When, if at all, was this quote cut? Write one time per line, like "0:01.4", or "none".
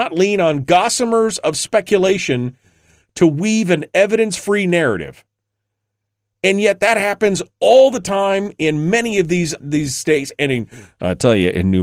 0:09.6